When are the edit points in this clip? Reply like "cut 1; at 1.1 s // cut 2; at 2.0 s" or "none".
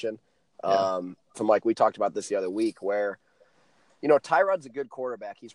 cut 1; at 1.3 s